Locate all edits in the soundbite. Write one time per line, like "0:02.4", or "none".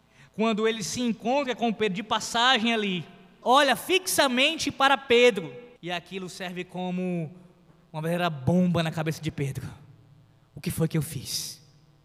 0:03.4
0:05.8